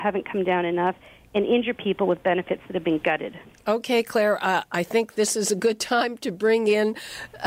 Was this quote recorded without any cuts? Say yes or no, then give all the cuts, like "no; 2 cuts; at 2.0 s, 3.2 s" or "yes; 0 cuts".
yes; 0 cuts